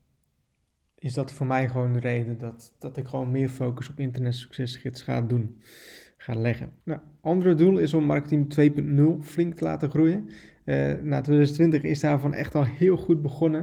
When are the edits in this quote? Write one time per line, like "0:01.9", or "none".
0:02.8
0:06.8